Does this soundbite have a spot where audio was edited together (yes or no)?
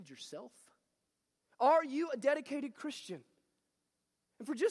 no